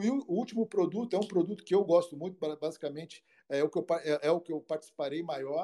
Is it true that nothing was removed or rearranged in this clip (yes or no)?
yes